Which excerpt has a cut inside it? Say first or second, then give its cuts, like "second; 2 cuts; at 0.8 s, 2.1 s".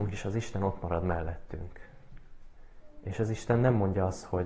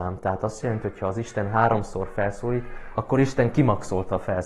second; 1 cut; at 2.9 s